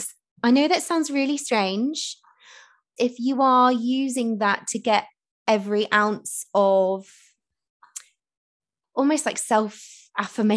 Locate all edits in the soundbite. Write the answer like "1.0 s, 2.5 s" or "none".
3.0 s